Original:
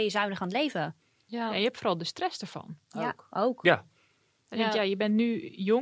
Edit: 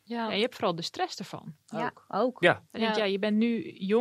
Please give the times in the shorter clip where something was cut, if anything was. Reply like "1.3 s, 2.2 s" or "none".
2.7 s